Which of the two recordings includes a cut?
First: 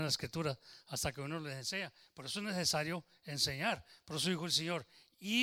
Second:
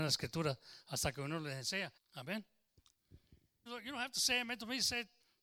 second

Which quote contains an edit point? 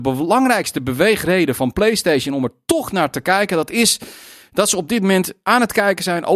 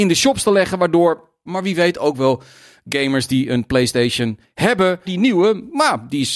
second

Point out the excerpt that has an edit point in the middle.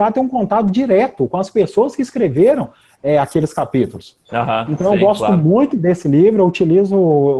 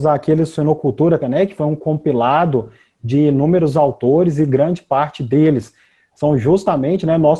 second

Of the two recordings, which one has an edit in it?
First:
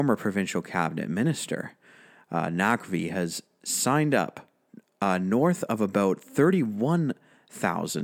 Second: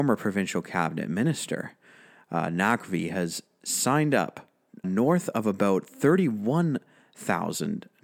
second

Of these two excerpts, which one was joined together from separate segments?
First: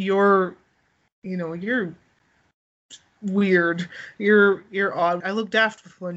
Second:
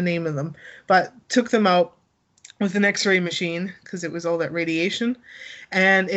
first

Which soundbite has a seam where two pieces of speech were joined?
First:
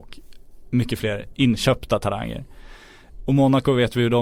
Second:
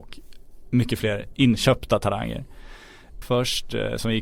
second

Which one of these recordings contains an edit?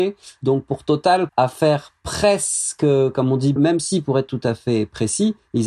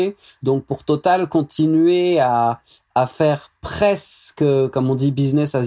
first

